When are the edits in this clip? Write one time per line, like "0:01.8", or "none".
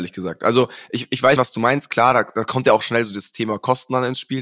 0:01.4